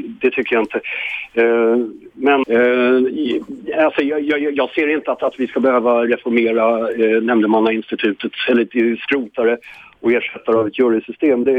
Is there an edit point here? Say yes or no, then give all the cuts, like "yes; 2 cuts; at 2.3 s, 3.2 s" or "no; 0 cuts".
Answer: yes; 1 cut; at 2.4 s